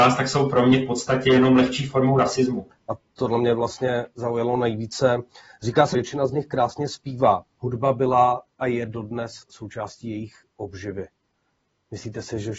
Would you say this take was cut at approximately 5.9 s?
yes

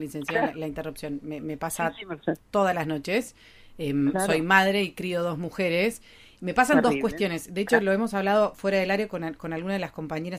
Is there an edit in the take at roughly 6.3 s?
no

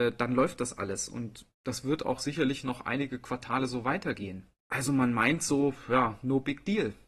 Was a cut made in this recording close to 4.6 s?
yes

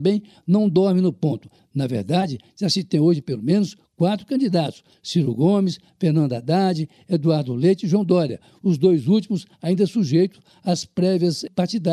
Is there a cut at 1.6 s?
yes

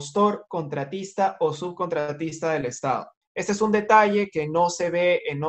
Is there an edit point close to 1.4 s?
no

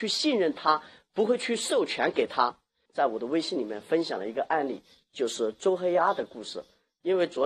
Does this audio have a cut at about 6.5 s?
no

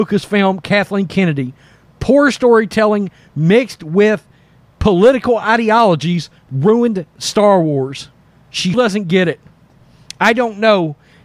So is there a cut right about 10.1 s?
no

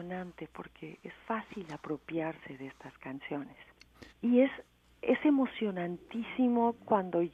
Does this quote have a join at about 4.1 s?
yes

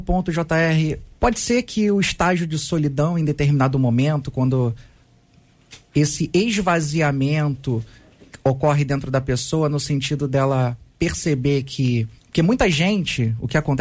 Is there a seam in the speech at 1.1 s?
yes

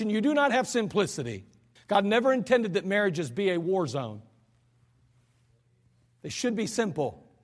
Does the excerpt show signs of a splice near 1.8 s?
yes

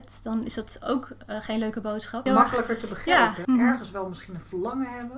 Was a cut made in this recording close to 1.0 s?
no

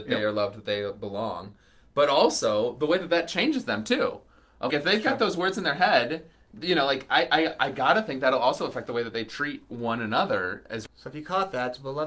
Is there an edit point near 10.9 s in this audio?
yes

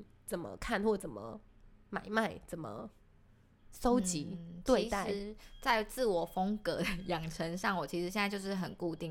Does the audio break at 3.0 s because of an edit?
no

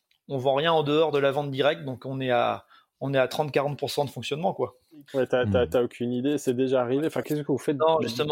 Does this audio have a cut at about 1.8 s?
no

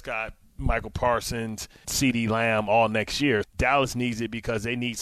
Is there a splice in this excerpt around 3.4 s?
yes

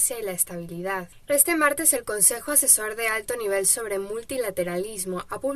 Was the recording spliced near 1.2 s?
yes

